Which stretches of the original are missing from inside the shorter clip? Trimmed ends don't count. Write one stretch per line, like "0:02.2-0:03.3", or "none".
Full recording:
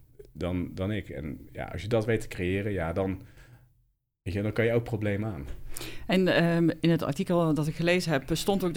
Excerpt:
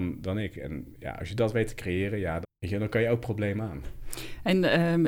0:02.9-0:04.0